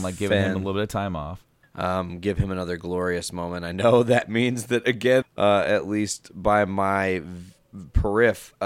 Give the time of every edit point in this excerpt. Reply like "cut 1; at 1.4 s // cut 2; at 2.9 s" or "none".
cut 1; at 1.6 s // cut 2; at 5.2 s